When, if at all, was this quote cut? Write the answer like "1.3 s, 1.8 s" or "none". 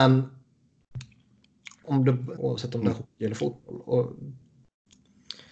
2.3 s